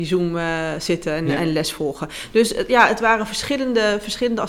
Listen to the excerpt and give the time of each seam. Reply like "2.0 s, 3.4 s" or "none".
none